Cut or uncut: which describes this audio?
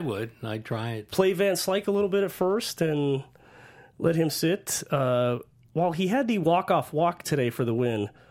cut